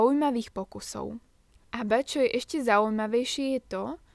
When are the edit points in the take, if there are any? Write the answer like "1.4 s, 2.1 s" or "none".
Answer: 1.6 s